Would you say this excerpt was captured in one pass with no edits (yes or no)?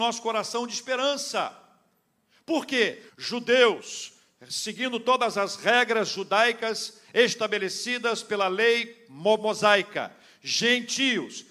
no